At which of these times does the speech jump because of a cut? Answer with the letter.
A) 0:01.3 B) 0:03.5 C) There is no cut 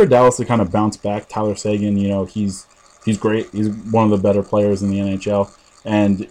C